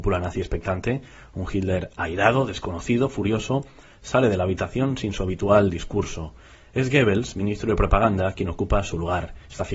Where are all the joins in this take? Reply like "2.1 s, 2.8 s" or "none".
none